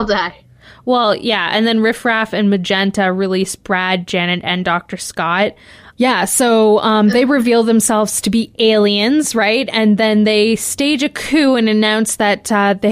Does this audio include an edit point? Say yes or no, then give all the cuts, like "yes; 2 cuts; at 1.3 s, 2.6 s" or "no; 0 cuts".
yes; 1 cut; at 5.9 s